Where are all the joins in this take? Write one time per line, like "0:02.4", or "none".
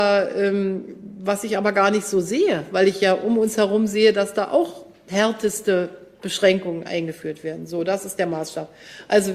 none